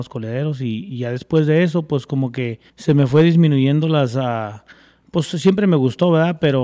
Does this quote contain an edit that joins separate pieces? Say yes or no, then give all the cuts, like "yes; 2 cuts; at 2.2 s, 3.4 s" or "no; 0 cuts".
yes; 1 cut; at 2.7 s